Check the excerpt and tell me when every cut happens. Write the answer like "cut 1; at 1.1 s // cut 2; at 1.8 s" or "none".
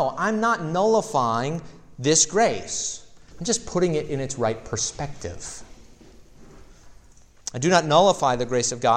cut 1; at 3.3 s